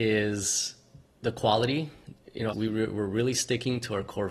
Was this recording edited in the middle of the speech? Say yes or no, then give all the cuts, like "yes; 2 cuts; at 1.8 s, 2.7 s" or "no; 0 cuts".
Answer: yes; 1 cut; at 2.5 s